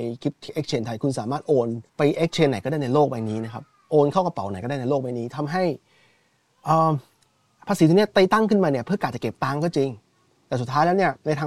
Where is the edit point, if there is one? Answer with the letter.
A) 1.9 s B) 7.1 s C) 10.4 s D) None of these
A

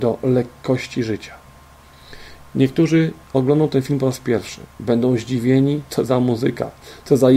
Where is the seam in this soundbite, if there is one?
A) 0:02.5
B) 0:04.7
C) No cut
A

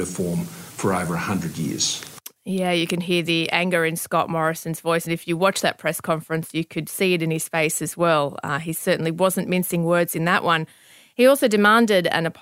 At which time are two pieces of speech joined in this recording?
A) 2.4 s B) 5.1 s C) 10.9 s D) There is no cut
D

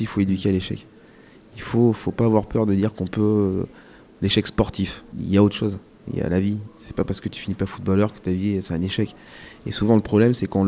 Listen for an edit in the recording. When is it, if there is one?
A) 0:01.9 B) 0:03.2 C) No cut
A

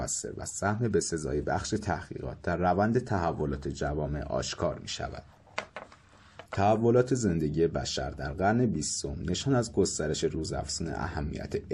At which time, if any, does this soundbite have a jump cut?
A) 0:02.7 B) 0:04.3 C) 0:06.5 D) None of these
C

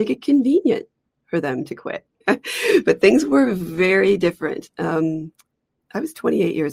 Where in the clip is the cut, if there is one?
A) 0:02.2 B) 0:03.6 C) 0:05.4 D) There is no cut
A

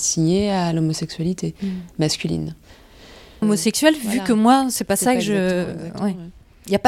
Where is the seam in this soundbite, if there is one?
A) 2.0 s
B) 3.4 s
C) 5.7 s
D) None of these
B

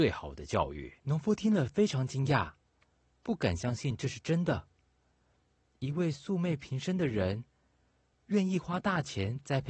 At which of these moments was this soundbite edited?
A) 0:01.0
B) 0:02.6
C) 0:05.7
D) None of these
A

